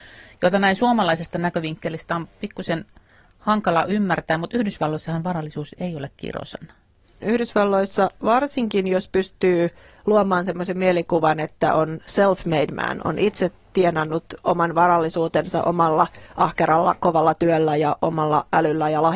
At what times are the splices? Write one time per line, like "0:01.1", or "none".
0:07.2